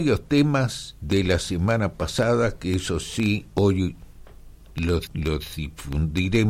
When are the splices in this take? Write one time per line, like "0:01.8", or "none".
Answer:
0:05.1